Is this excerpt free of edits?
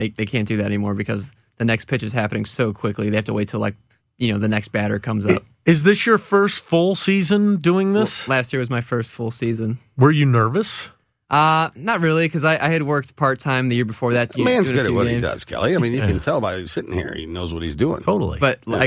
yes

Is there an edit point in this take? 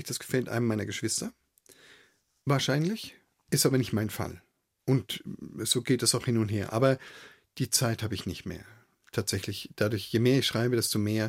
no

